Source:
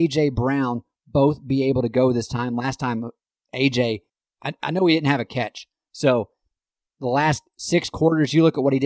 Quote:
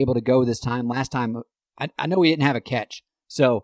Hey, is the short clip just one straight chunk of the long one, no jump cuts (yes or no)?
no